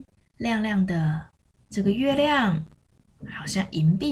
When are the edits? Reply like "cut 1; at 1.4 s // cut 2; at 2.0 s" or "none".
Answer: cut 1; at 1.7 s

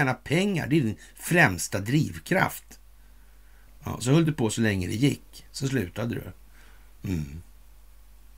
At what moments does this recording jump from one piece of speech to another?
cut 1; at 3.7 s

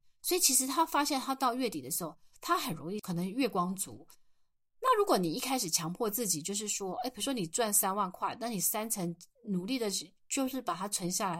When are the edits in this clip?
none

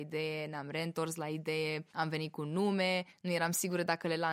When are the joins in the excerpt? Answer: cut 1; at 1.9 s // cut 2; at 3.1 s

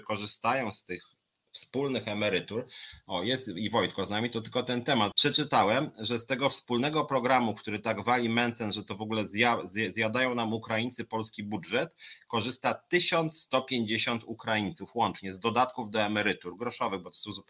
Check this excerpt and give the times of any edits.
cut 1; at 5.1 s

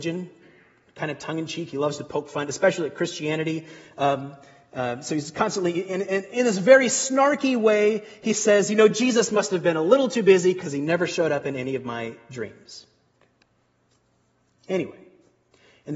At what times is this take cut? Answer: none

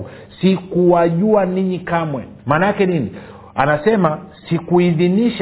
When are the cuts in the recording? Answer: cut 1; at 2.4 s

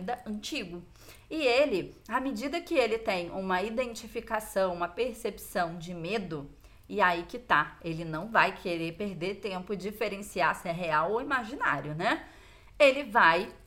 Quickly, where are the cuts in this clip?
none

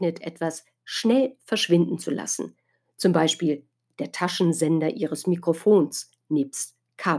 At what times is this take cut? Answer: none

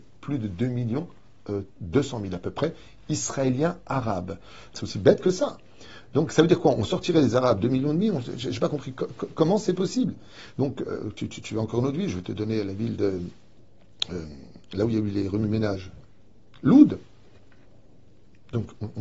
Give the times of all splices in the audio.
cut 1; at 4.7 s // cut 2; at 10.5 s

